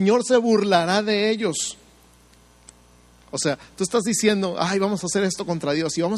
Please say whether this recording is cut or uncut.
uncut